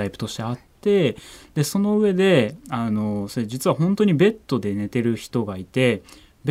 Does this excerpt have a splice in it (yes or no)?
no